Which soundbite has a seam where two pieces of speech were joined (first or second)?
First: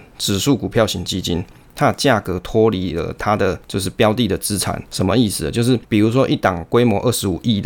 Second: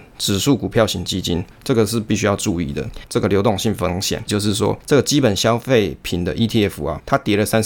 second